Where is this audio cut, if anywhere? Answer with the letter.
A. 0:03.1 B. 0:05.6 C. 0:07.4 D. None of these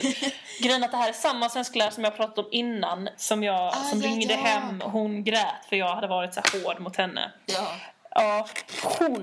A